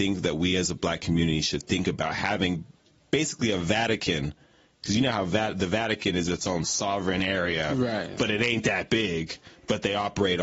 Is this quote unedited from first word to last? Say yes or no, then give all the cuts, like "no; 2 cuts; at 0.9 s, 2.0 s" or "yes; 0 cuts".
yes; 0 cuts